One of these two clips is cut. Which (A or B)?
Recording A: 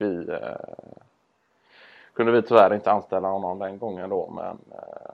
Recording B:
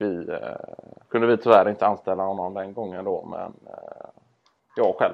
B